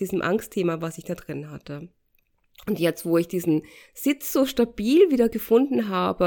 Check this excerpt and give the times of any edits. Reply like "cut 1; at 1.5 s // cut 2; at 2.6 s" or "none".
none